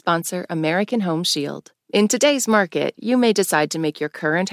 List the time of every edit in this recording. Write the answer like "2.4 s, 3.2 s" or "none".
none